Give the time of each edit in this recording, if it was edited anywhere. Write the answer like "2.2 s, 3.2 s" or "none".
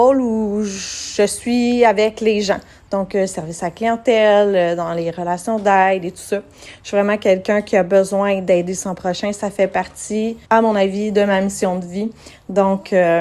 10.4 s